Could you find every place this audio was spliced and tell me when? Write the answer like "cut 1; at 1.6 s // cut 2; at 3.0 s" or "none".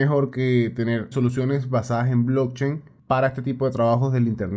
cut 1; at 1.1 s